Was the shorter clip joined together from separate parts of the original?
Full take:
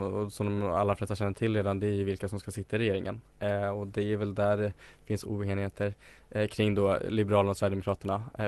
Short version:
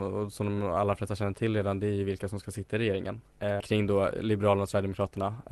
yes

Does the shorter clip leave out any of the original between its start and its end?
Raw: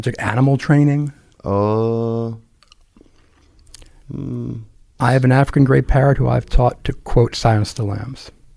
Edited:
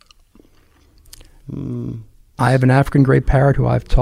no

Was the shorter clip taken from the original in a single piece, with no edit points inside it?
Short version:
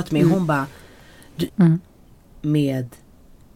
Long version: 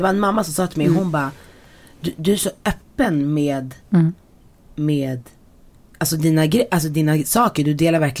no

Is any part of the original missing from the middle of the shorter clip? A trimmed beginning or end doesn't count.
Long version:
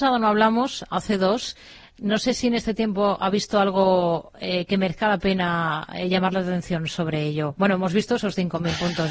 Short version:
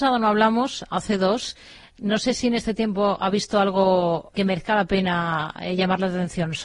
yes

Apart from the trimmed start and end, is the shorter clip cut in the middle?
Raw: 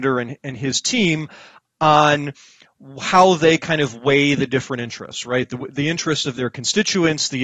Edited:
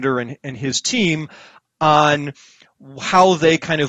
no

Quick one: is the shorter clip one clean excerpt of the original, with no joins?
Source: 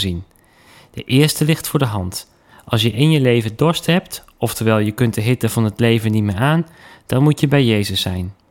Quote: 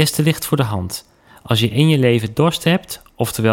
yes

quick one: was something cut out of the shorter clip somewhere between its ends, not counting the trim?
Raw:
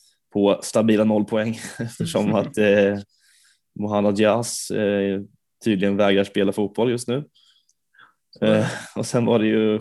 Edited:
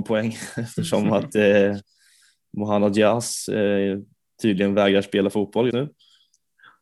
yes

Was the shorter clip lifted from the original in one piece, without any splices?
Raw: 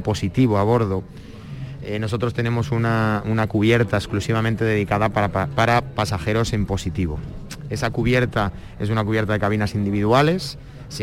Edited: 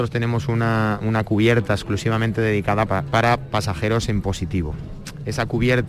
no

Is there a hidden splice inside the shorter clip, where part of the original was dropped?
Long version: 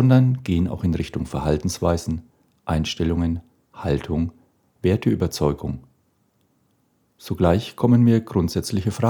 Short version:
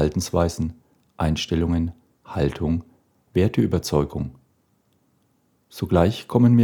no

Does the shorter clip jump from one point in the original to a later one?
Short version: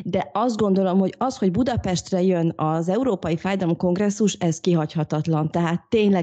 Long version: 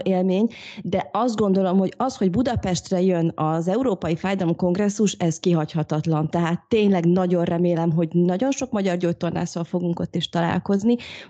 no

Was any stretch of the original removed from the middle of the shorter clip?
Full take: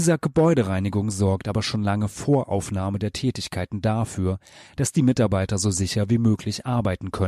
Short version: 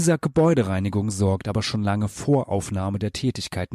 no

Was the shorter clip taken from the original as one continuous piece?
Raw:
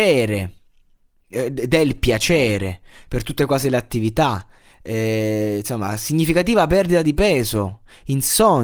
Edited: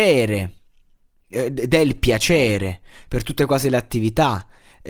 yes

